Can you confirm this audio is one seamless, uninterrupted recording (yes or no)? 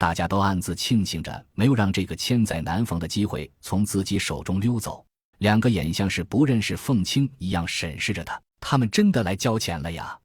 no